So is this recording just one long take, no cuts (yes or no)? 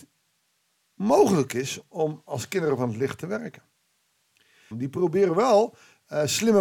no